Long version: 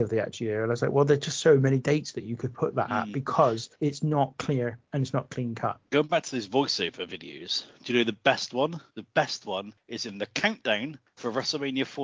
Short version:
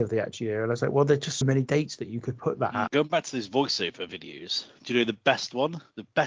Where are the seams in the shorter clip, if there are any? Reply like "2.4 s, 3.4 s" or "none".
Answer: 1.4 s, 2.9 s